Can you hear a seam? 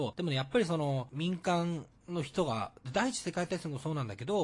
no; 0 cuts

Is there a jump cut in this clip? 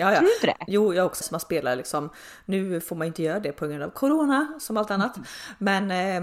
yes; 1 cut; at 1.2 s

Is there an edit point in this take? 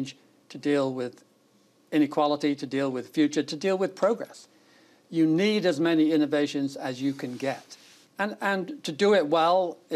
yes; 1 cut; at 8.1 s

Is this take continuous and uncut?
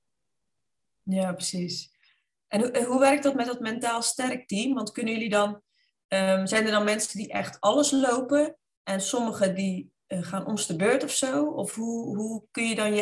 yes; 0 cuts

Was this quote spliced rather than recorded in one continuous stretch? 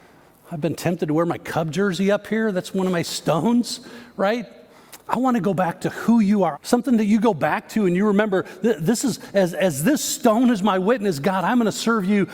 yes; 2 cuts; at 5.1 s, 6.5 s

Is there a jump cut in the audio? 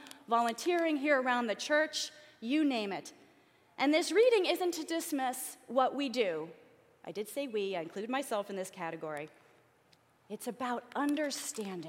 no; 0 cuts

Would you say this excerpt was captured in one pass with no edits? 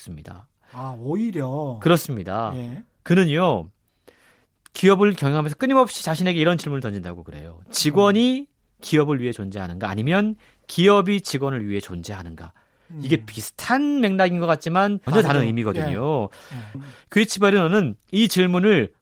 no; 2 cuts; at 15.1 s, 16.7 s

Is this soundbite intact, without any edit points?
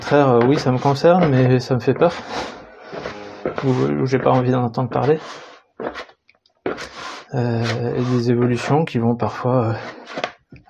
no; 1 cut; at 7.3 s

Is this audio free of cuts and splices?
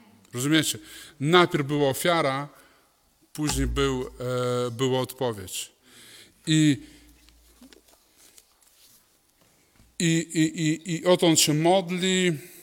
yes; 0 cuts

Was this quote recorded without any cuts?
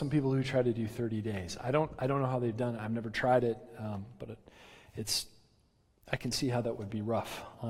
yes; 0 cuts

